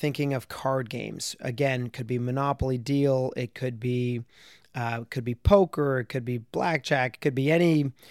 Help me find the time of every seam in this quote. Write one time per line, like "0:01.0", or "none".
none